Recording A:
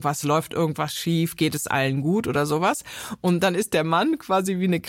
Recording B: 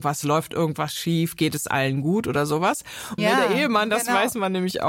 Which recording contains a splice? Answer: B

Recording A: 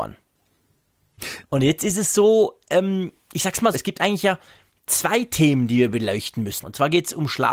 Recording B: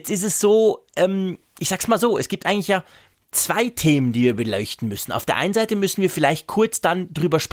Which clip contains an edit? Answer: A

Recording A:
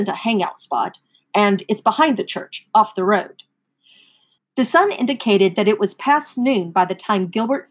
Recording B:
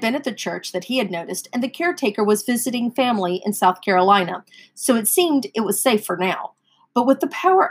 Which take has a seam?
A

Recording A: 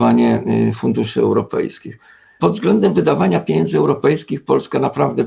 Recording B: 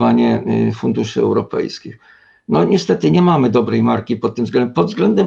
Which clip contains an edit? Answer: A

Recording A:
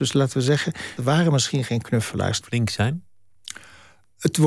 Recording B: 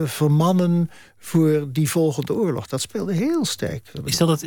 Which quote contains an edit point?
A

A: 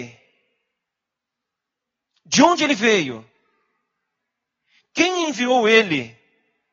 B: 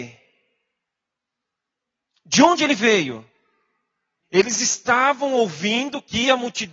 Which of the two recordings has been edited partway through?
B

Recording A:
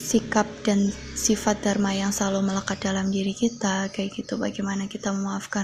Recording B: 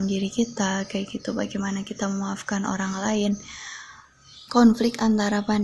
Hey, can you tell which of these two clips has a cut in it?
B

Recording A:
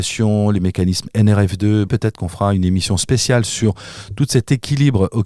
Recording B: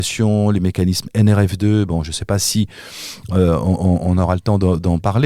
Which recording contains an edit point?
A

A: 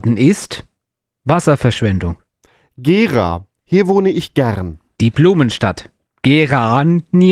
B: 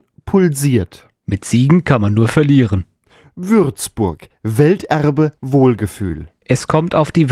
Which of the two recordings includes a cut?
B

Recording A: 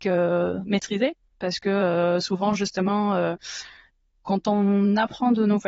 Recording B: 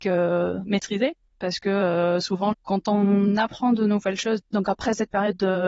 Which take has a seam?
B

